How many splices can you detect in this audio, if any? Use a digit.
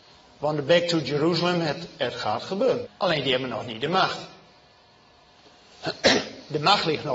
1